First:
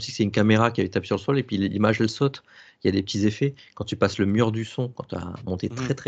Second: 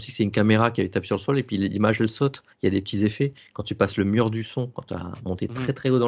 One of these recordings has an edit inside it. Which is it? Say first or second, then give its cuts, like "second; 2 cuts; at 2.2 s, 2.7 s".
second; 1 cut; at 2.5 s